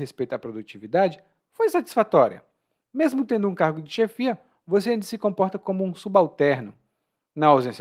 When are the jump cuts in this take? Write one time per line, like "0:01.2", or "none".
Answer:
0:02.7